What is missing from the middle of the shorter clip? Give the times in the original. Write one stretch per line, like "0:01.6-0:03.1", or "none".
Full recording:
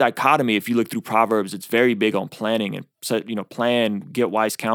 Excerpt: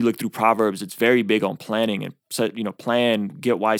none